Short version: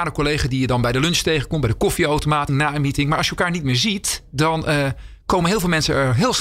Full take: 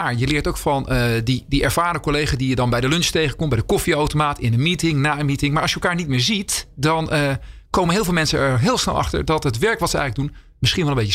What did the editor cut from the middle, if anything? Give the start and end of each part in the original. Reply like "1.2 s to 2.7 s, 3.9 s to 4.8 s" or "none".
4.4 s to 4.9 s